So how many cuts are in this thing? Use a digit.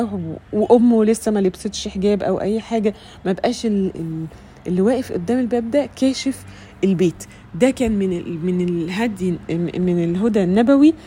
1